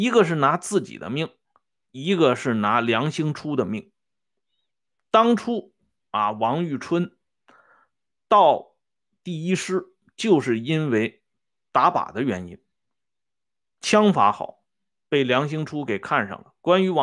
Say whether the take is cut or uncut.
uncut